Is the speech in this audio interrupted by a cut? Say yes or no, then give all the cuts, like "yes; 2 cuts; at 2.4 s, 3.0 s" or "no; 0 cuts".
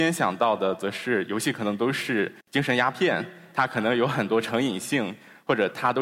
yes; 1 cut; at 2.4 s